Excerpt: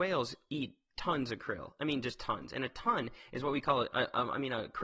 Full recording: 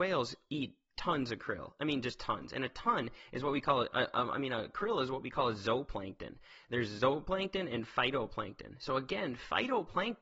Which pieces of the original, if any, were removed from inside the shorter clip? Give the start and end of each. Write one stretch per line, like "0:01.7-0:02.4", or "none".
none